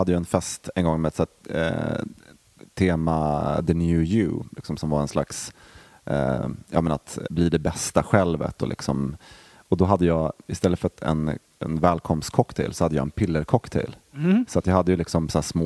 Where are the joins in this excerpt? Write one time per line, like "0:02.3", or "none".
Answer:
0:07.3